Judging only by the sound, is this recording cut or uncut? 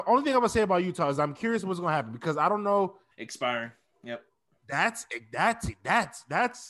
cut